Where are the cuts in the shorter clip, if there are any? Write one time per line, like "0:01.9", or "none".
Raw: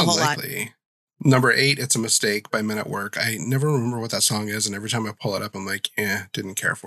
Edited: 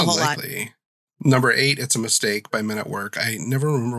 none